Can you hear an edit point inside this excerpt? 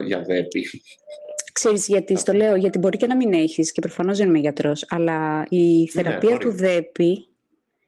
no; 0 cuts

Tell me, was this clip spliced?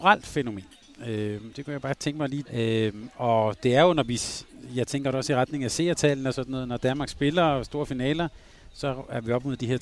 yes; 1 cut; at 2.4 s

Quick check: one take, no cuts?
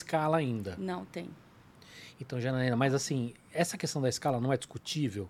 yes; 0 cuts

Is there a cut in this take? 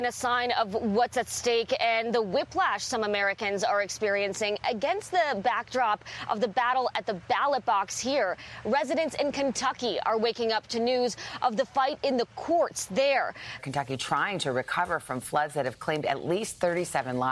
yes; 1 cut; at 13.6 s

